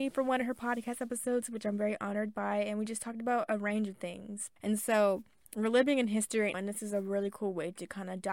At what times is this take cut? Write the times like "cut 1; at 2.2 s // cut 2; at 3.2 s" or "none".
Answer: cut 1; at 4.6 s // cut 2; at 6.5 s